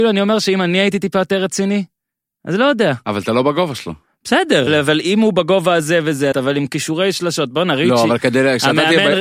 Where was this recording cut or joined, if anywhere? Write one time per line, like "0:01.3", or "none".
0:04.7
0:06.3